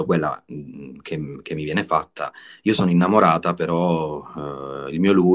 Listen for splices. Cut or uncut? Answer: uncut